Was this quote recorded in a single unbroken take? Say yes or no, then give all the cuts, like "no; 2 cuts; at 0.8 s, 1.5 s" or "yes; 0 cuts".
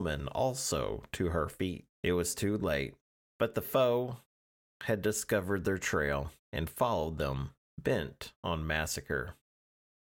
no; 3 cuts; at 1.9 s, 3.2 s, 6.4 s